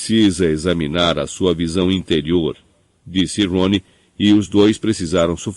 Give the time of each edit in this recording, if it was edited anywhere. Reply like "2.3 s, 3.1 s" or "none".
none